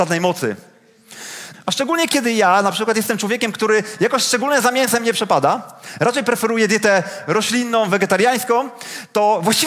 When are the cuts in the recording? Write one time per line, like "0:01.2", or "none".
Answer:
0:01.5